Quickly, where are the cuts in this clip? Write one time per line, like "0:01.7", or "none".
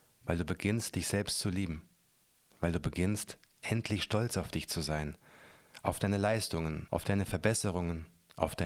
0:02.5
0:06.9